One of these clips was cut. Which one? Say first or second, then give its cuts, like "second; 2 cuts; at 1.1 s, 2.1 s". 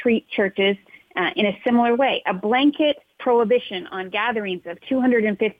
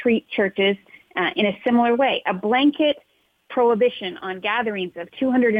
first; 1 cut; at 3.1 s